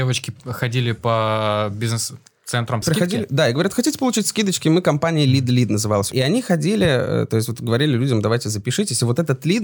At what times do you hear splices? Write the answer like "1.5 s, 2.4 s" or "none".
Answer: 2.8 s